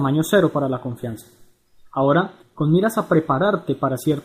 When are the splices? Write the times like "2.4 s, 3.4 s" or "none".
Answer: 2.4 s